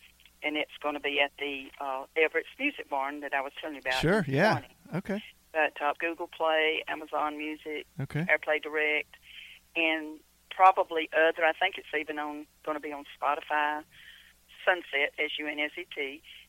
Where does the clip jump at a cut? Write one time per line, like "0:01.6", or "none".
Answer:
0:05.9
0:07.9
0:14.6